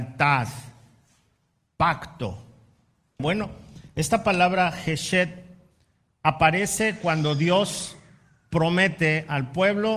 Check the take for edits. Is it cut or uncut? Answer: cut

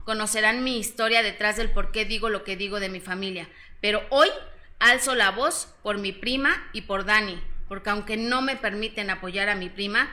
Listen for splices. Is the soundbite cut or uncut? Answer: uncut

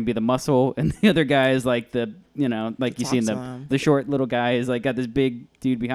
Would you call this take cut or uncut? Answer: cut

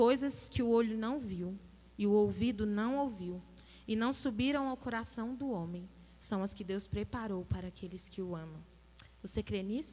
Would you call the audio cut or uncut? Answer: uncut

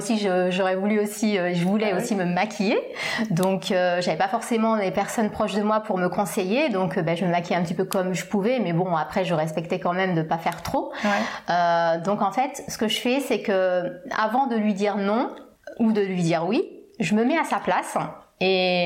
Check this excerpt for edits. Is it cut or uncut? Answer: uncut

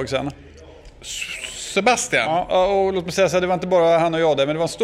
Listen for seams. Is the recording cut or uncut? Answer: uncut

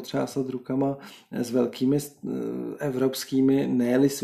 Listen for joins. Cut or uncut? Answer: uncut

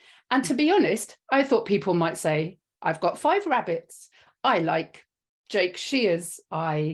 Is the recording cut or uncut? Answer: cut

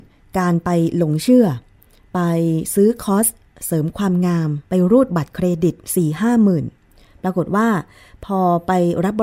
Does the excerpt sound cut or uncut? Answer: cut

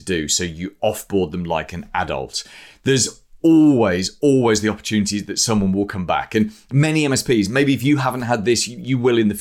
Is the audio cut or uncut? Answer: uncut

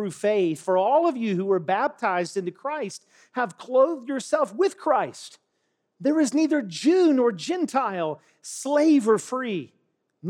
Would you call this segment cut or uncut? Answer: uncut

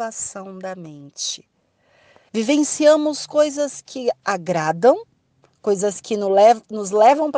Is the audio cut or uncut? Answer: cut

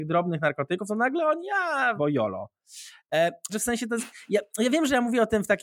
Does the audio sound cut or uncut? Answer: cut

